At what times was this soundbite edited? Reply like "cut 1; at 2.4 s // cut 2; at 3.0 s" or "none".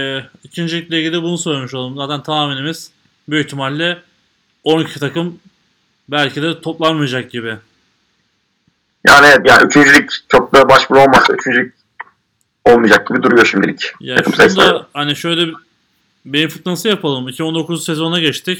cut 1; at 9.4 s